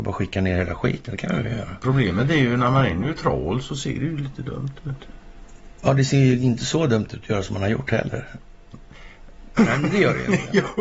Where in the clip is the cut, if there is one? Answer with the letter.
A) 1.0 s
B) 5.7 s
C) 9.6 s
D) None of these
C